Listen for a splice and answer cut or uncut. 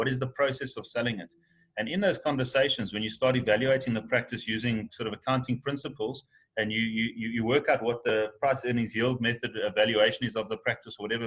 uncut